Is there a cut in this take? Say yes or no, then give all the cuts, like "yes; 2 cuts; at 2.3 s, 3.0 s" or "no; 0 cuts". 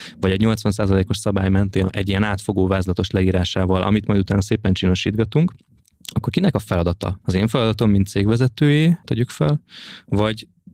yes; 2 cuts; at 7.2 s, 9.0 s